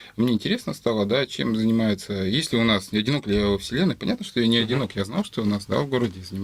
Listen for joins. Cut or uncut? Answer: uncut